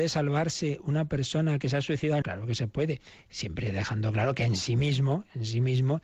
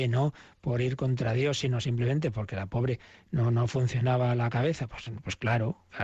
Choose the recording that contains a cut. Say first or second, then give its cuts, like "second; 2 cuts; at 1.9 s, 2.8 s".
first; 1 cut; at 2.2 s